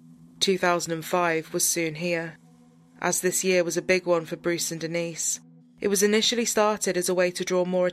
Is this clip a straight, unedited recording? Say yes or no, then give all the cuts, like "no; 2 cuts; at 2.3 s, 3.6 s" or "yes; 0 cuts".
no; 1 cut; at 5.6 s